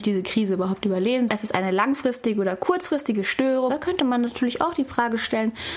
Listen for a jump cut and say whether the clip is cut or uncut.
cut